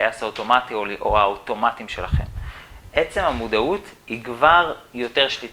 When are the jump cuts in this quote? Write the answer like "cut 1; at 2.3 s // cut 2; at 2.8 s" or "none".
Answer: none